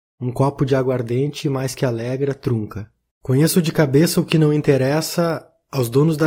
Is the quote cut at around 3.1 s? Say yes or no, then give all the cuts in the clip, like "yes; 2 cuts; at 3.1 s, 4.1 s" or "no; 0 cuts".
yes; 1 cut; at 3.1 s